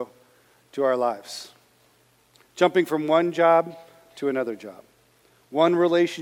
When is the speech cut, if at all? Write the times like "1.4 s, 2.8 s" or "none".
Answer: none